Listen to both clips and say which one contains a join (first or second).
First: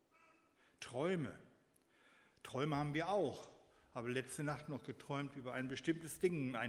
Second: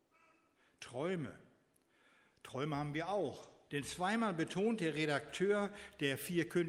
second